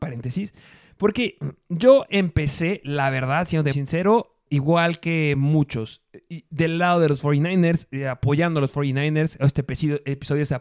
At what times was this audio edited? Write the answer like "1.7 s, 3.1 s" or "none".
3.7 s